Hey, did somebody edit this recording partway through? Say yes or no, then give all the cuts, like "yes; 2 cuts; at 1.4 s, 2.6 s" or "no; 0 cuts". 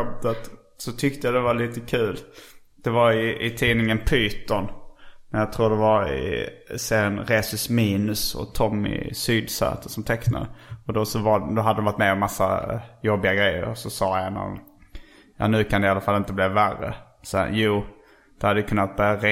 no; 0 cuts